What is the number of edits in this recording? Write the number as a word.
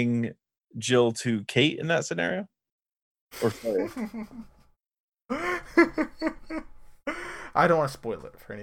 zero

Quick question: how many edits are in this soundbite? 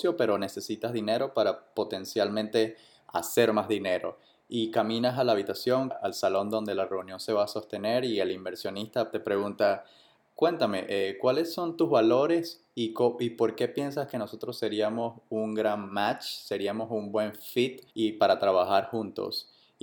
three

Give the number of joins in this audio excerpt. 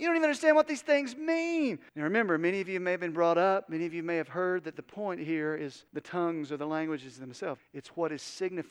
three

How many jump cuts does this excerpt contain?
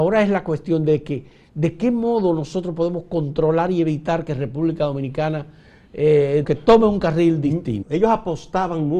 two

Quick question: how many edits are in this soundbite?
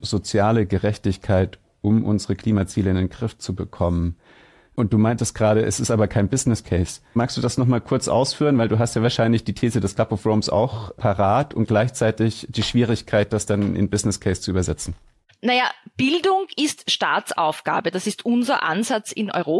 zero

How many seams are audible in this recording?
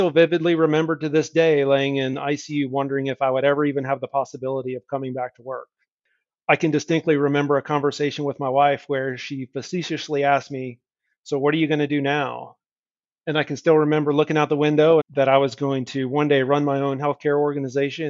one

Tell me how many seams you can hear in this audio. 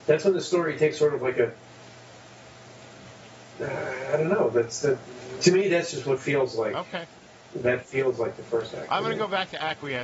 one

